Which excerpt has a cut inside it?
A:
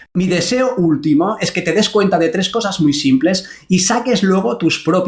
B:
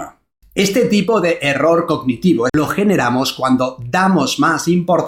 B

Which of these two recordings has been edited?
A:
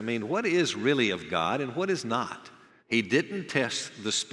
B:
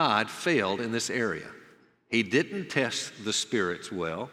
A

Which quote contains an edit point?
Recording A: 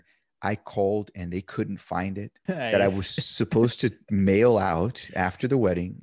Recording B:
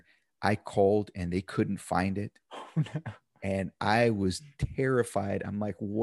A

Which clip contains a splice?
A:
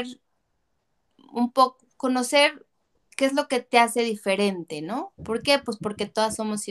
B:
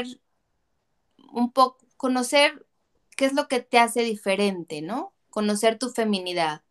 A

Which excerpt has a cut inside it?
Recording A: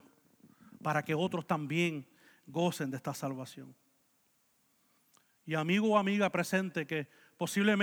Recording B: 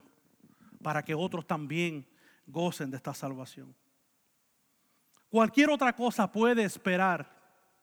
B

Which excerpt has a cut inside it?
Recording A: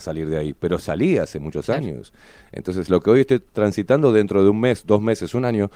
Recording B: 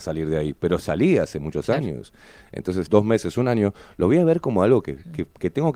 B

